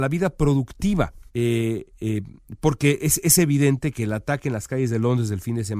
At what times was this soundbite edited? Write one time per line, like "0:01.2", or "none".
0:01.3